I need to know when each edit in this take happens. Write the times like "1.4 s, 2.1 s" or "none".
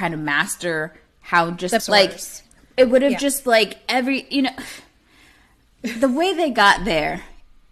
1.8 s